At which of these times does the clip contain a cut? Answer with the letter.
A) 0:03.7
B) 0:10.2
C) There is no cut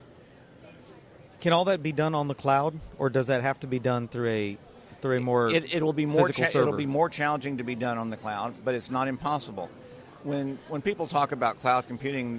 C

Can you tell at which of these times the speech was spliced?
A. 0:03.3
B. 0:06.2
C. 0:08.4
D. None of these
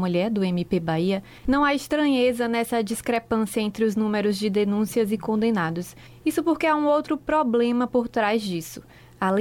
D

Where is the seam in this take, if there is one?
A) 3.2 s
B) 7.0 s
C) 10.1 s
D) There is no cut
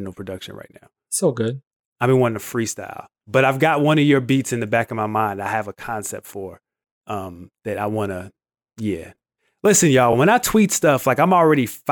D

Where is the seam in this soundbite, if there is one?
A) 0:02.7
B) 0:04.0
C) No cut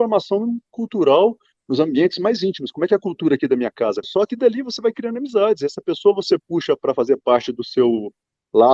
B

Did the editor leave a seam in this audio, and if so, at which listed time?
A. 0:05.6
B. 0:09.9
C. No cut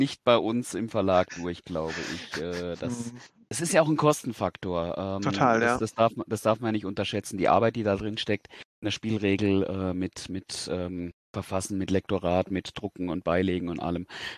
C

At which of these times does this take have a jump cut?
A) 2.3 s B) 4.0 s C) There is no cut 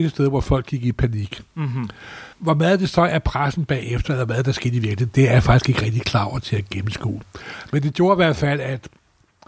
A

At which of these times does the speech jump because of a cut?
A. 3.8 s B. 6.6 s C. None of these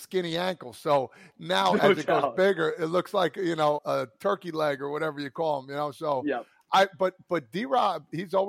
A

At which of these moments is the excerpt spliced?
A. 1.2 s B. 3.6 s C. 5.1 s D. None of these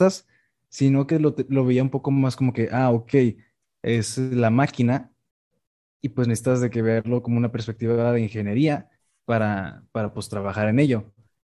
B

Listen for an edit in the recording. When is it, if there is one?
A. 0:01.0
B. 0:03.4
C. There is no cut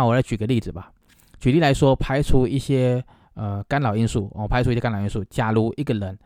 C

